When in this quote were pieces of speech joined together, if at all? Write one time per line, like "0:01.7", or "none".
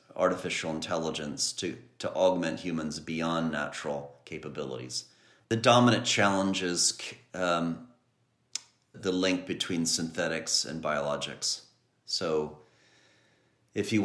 0:05.4
0:08.9